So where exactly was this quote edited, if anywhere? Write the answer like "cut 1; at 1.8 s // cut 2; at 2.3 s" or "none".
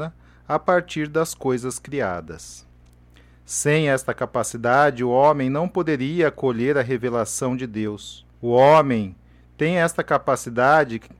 cut 1; at 8.3 s